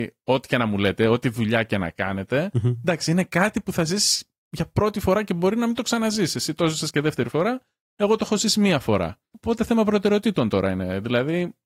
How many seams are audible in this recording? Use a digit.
0